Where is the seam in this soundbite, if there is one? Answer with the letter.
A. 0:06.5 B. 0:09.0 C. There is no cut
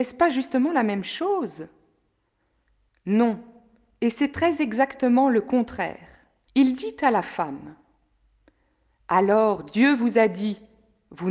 A